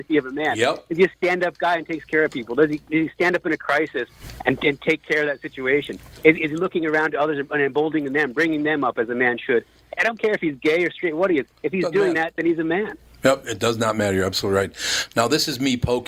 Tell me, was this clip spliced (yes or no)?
no